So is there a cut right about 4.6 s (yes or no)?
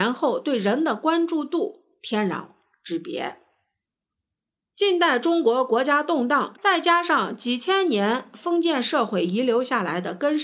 no